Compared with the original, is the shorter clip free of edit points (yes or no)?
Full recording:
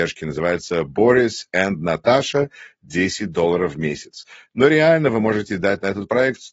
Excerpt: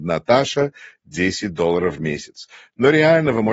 yes